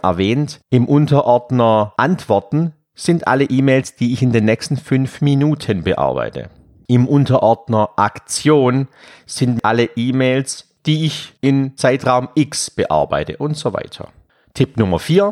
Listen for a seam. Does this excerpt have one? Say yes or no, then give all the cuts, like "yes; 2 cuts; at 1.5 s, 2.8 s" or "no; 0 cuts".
no; 0 cuts